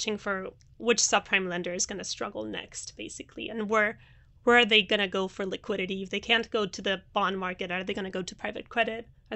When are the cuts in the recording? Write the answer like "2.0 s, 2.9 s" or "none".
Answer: none